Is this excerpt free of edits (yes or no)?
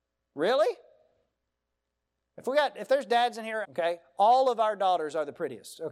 no